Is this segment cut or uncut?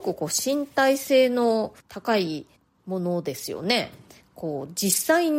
uncut